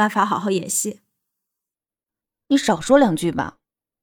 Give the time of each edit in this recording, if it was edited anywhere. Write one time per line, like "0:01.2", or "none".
none